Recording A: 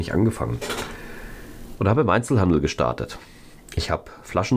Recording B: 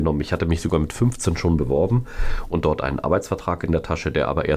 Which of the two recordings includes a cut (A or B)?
A